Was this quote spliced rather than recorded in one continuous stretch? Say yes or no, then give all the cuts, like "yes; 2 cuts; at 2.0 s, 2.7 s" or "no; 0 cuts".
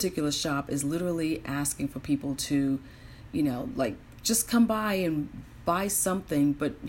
no; 0 cuts